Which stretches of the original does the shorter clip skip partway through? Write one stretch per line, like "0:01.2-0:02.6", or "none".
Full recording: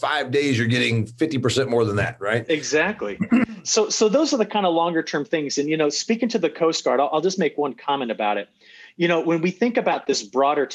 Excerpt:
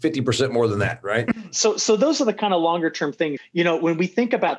0:02.5-0:03.4
0:05.5-0:08.8